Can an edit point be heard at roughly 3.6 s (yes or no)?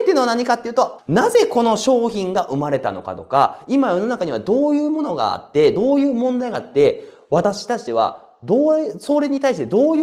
no